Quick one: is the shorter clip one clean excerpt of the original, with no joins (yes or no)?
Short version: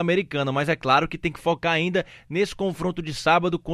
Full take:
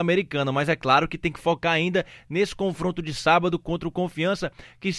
yes